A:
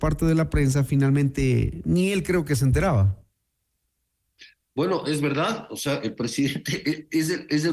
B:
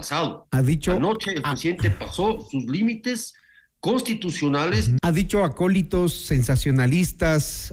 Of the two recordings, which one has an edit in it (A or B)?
B